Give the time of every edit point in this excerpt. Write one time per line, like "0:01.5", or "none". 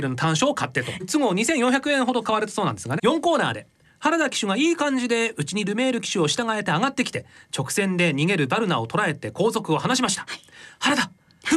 0:01.0
0:03.0